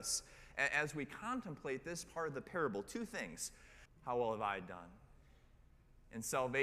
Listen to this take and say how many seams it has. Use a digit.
1